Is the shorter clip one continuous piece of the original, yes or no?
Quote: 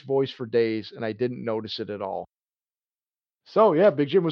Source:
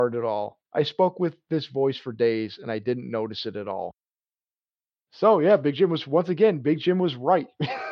yes